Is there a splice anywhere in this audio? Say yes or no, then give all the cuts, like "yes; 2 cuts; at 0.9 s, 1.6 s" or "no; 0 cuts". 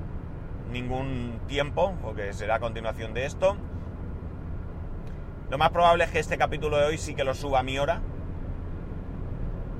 yes; 1 cut; at 5.5 s